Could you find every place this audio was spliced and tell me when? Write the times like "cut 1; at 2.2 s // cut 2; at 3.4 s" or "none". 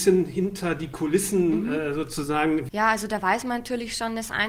cut 1; at 2.7 s